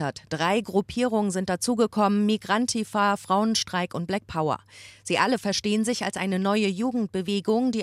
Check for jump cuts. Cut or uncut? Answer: uncut